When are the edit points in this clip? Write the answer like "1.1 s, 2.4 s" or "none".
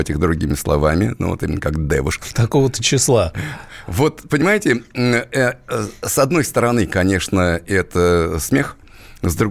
2.2 s